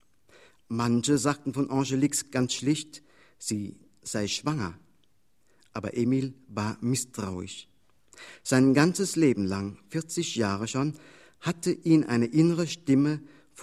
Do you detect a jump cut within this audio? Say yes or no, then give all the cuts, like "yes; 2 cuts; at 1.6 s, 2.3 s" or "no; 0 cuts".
no; 0 cuts